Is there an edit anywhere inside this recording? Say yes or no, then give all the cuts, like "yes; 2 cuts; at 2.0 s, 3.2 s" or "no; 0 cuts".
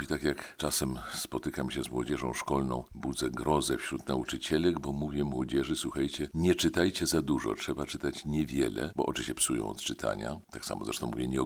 no; 0 cuts